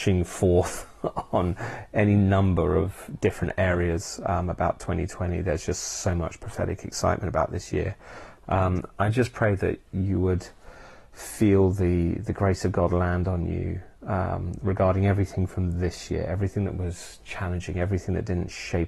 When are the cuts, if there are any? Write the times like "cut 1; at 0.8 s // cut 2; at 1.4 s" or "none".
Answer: none